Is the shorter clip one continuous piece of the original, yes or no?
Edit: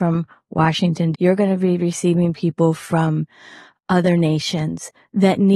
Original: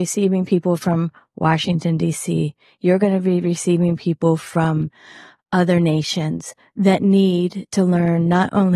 no